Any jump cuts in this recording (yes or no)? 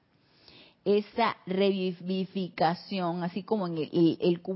no